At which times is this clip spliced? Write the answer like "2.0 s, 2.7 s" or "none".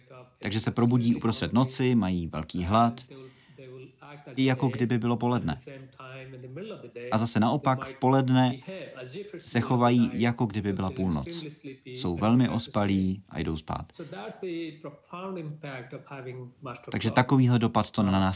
4.4 s